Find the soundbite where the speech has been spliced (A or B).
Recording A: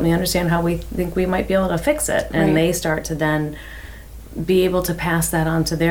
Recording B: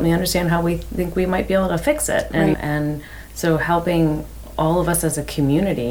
B